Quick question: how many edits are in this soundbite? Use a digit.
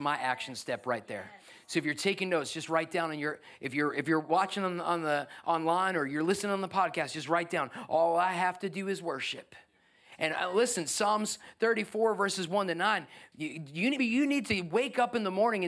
1